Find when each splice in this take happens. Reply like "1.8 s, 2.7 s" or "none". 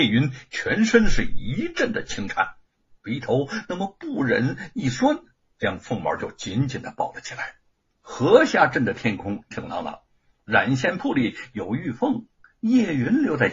8.0 s, 9.5 s